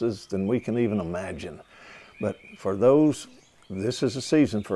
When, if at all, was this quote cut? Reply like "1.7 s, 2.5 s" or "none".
none

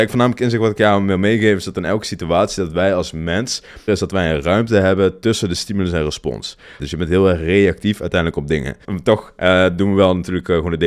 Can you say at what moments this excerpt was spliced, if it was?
3.9 s, 6.8 s, 8.8 s

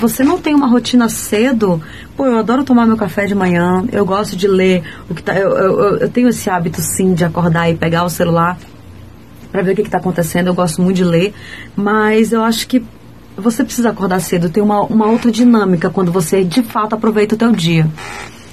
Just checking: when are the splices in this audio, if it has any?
11.7 s, 14.9 s

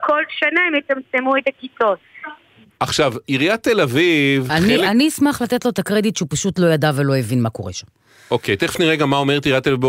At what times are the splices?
2.7 s

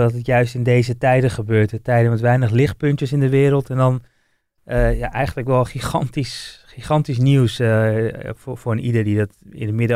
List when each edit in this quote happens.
none

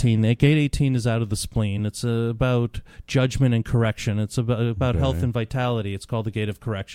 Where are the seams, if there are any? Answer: none

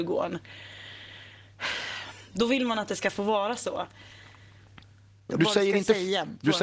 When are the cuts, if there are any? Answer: 5.3 s

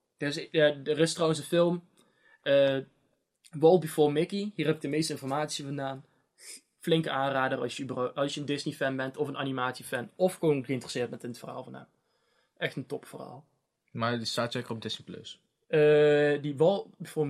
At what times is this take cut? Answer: none

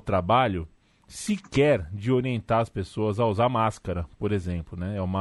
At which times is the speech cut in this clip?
none

